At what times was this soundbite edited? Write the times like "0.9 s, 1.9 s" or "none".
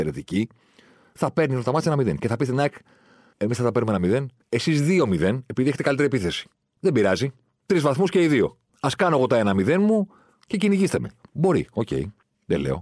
none